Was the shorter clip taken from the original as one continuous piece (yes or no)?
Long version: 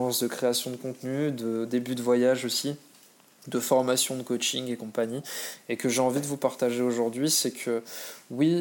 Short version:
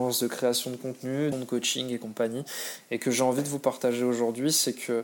no